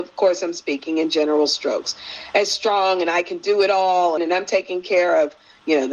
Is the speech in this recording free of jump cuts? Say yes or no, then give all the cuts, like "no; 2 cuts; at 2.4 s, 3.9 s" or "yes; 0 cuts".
no; 1 cut; at 4.2 s